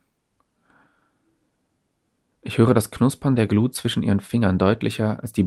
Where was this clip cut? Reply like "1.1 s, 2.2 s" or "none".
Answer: none